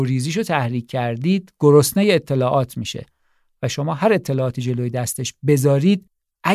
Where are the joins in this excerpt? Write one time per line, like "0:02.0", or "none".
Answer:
none